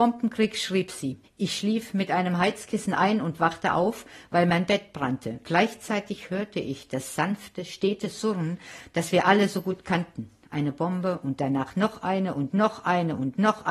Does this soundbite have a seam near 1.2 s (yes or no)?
yes